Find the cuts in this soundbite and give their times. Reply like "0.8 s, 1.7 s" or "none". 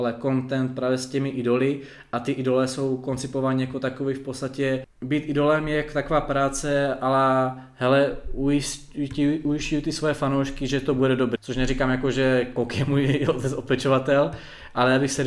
4.8 s, 11.4 s